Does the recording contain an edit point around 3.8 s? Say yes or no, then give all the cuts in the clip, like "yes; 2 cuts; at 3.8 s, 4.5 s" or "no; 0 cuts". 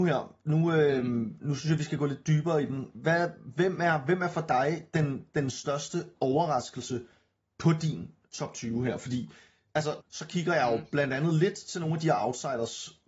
no; 1 cut; at 10.0 s